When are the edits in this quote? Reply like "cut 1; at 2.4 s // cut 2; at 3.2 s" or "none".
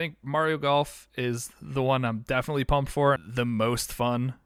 cut 1; at 3.2 s